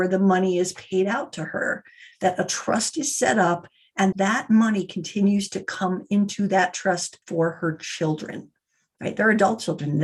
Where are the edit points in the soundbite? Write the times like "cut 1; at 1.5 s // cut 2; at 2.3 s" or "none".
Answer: cut 1; at 4.1 s // cut 2; at 7.2 s